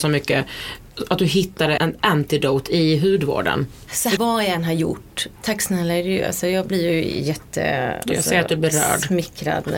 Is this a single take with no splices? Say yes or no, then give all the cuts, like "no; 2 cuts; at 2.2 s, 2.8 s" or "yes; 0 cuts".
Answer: no; 2 cuts; at 1.8 s, 4.2 s